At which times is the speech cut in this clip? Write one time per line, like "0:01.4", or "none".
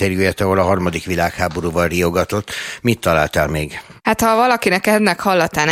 0:04.0